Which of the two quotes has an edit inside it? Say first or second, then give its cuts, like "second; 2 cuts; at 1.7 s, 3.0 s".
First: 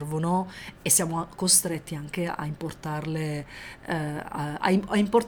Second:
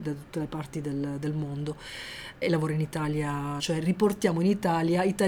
second; 2 cuts; at 2.4 s, 3.6 s